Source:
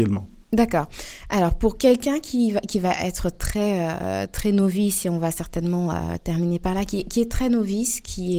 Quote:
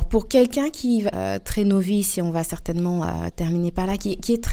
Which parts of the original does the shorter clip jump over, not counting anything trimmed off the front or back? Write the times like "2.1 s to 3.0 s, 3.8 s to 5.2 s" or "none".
2.6 s to 4.0 s